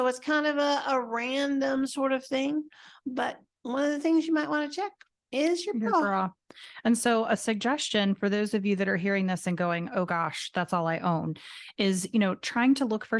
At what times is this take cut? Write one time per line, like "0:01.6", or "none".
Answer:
none